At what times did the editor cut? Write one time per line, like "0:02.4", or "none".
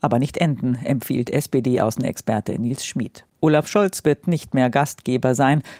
0:03.3

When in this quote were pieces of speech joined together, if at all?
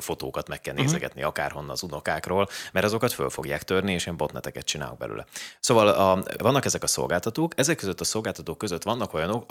0:06.4

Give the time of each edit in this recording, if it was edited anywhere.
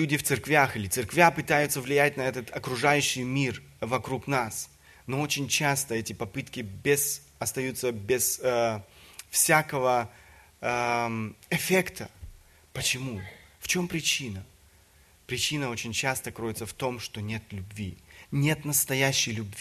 none

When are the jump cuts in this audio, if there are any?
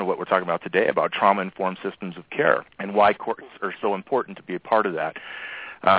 0:02.7

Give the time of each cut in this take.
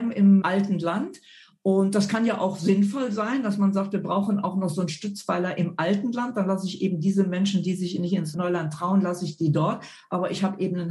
none

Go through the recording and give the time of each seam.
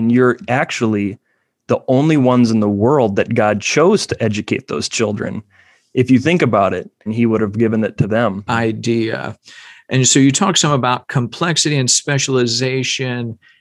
0:07.1
0:08.5

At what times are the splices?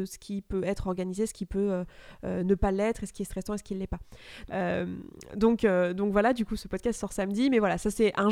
0:04.5
0:06.6

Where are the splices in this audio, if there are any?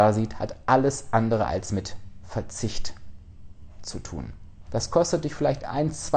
0:04.7

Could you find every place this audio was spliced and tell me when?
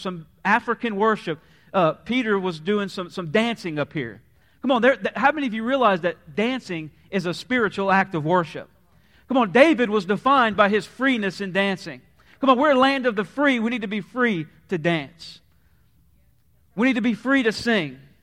none

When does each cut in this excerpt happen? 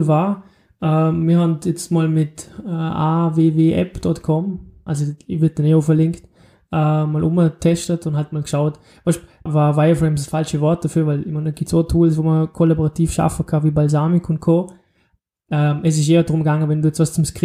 0:04.9
0:09.5

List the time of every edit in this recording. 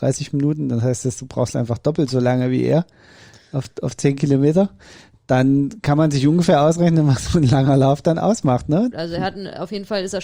0:08.9

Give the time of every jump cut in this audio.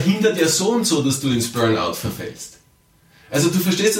none

